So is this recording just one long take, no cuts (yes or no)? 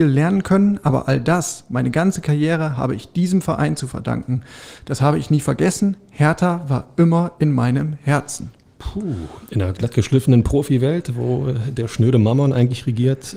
yes